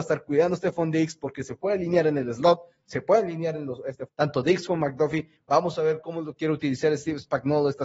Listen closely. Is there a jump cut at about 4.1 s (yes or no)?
yes